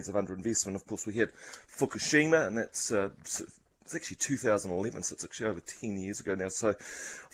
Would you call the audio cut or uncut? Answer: uncut